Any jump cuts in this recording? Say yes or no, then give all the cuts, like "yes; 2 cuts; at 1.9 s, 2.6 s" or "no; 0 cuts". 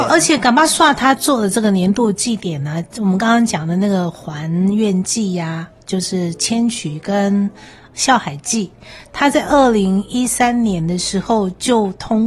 no; 0 cuts